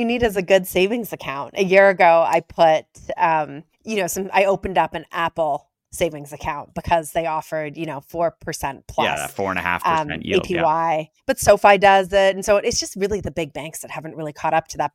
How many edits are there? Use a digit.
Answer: 1